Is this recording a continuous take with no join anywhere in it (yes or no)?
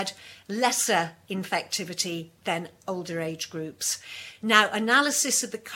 yes